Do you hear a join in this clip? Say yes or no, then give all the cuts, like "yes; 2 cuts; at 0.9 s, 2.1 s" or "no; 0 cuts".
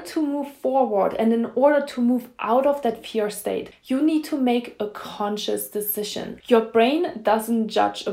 yes; 2 cuts; at 3.7 s, 6.4 s